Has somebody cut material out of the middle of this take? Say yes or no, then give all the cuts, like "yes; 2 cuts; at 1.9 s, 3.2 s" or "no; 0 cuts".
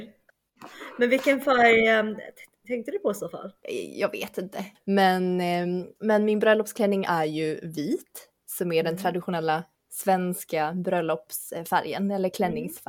no; 0 cuts